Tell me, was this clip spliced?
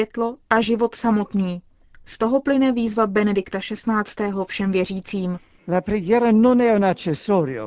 no; 0 cuts

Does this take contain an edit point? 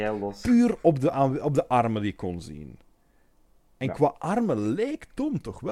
no; 0 cuts

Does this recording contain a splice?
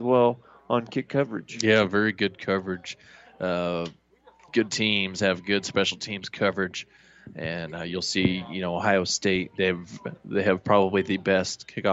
no; 0 cuts

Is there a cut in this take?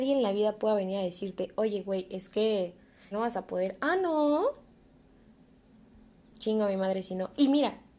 yes; 1 cut; at 3.1 s

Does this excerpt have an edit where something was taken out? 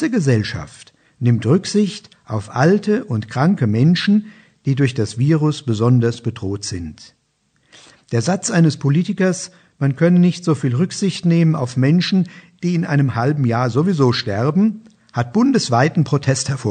no; 0 cuts

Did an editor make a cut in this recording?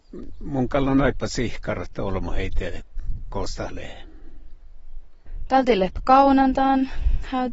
no; 0 cuts

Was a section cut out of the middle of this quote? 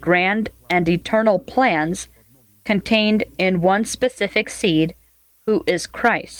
no; 0 cuts

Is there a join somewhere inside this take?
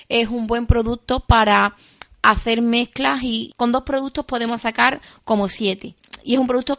no; 0 cuts

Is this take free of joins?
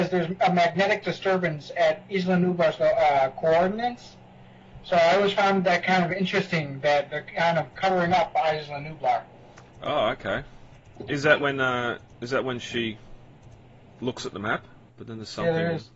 no; 1 cut; at 14.9 s

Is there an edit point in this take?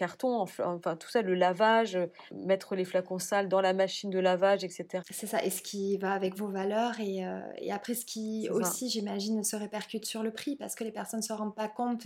yes; 2 cuts; at 2.3 s, 5.0 s

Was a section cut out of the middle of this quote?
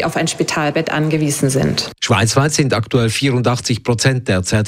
yes; 1 cut; at 2.0 s

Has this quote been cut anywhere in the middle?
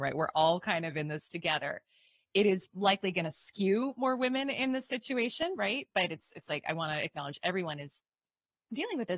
no; 0 cuts

